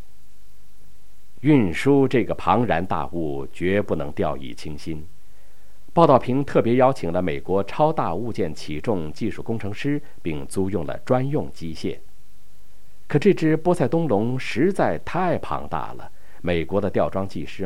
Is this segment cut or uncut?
uncut